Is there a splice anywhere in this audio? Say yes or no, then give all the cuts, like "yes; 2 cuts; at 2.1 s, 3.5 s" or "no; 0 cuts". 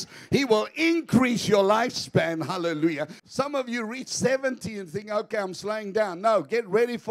yes; 1 cut; at 3.2 s